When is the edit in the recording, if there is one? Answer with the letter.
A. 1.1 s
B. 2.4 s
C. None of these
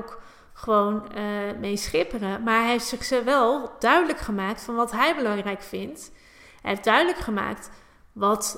C